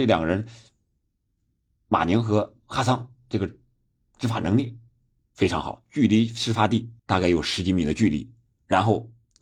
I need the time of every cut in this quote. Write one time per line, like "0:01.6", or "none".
0:05.3
0:07.0